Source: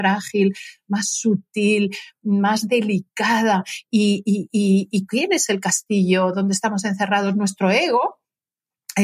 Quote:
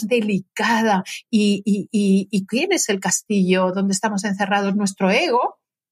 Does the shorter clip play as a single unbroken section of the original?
yes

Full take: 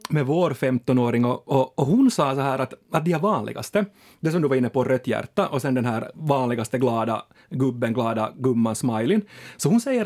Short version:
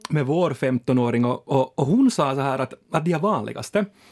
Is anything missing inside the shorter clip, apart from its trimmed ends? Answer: no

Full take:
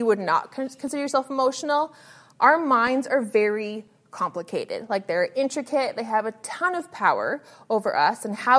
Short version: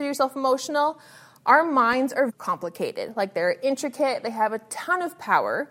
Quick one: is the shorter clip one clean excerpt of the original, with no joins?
no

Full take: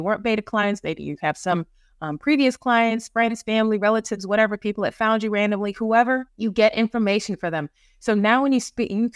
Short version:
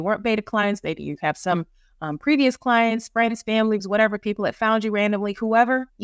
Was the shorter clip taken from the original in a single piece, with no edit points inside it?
no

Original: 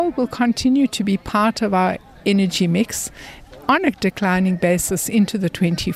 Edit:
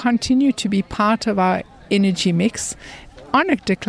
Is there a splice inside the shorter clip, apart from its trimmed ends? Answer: no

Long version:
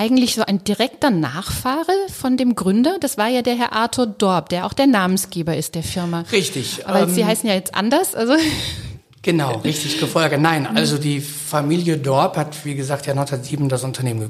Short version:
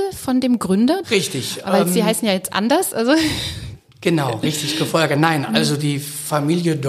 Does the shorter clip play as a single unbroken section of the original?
no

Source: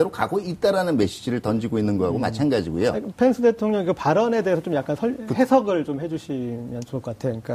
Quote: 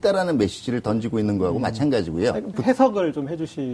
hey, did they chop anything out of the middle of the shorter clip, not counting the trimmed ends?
yes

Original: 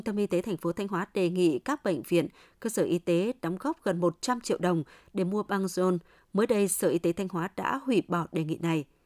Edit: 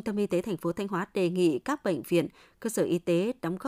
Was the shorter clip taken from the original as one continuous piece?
yes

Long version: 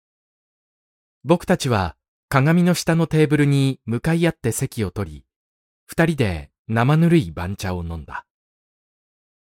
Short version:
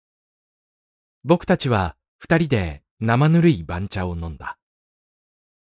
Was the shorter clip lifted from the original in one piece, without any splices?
no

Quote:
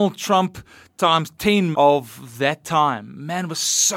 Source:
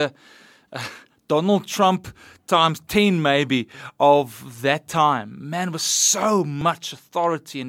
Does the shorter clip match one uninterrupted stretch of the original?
no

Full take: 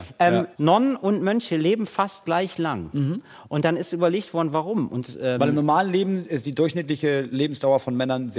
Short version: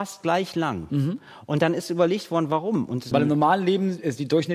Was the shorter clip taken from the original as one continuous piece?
no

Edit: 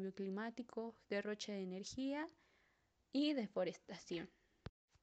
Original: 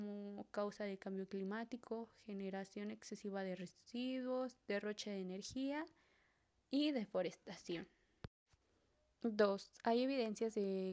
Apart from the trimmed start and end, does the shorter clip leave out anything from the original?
yes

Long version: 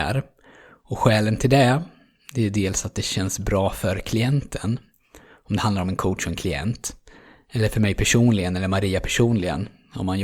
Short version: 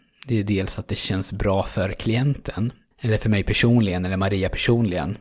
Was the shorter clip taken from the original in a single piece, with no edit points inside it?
no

